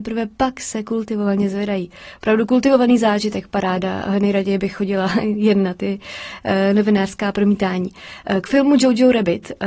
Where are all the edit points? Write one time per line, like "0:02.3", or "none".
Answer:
none